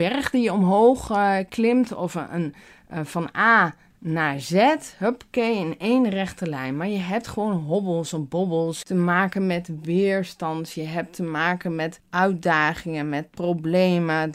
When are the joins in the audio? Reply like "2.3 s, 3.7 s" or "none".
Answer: none